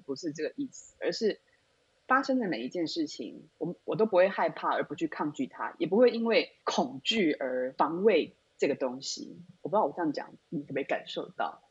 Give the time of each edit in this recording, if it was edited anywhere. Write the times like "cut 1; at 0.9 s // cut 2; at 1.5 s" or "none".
none